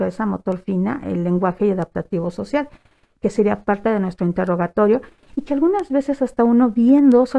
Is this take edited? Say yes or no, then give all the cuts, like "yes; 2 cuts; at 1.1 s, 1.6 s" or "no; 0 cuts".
no; 0 cuts